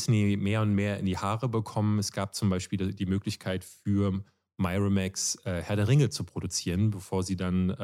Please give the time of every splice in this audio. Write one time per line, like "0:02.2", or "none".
none